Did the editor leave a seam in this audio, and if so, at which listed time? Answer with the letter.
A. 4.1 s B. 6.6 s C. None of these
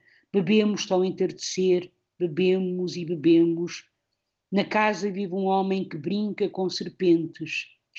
C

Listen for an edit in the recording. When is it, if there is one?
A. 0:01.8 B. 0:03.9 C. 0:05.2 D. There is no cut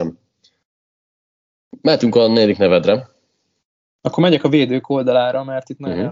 D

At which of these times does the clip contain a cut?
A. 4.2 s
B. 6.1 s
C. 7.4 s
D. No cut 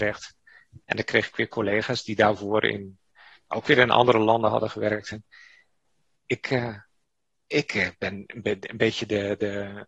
B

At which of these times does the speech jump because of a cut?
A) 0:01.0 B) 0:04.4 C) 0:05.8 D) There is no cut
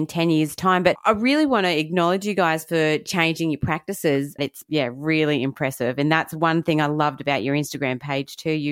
B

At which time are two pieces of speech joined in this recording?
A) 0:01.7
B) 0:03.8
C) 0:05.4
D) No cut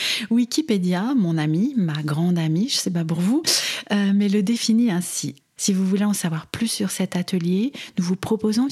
C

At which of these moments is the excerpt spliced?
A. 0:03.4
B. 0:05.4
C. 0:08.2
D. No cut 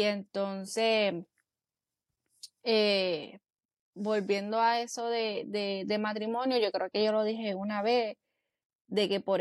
D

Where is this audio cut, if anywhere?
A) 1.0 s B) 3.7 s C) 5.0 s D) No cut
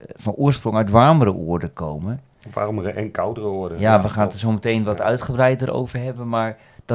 D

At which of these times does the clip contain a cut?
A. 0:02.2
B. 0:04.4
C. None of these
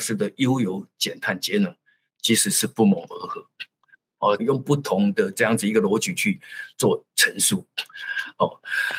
B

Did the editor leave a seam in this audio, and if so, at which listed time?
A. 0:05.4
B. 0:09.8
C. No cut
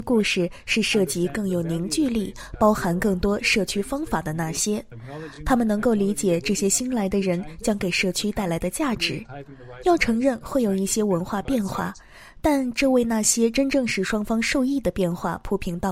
C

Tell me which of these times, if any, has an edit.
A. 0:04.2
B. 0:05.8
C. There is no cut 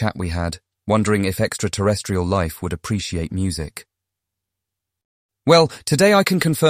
C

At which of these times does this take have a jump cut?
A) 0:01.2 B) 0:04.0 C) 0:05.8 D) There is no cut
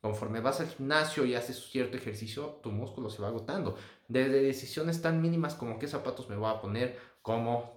B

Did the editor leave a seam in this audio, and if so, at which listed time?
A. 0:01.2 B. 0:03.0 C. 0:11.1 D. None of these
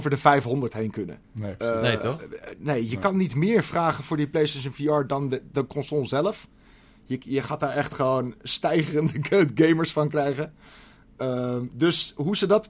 A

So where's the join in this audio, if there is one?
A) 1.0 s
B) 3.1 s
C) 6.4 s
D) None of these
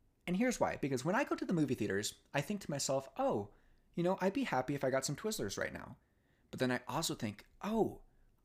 D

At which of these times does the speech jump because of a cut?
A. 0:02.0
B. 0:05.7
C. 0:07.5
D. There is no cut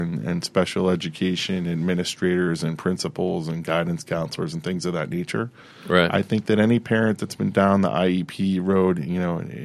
B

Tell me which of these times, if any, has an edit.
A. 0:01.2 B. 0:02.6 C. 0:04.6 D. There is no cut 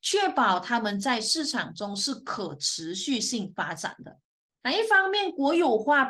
C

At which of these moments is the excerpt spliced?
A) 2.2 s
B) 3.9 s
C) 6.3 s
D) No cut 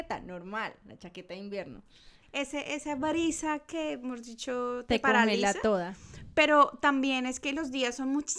A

